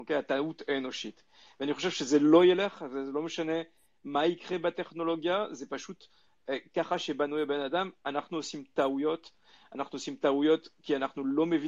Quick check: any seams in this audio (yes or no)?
no